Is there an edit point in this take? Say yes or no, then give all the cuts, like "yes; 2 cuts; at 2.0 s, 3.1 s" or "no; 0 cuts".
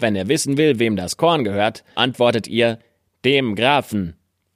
yes; 1 cut; at 1.9 s